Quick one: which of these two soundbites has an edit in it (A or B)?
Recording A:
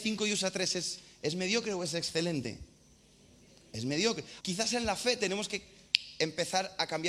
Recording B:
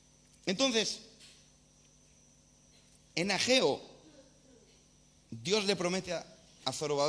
A